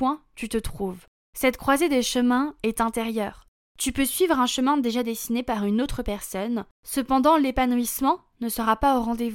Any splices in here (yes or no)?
no